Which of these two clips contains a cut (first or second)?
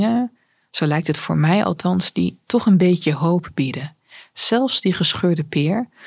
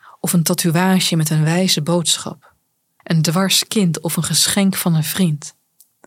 second